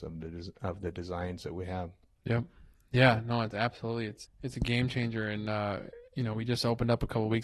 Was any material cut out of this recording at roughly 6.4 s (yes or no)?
no